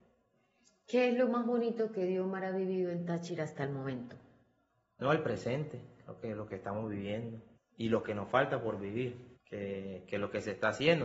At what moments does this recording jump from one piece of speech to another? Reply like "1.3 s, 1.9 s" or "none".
7.5 s, 9.3 s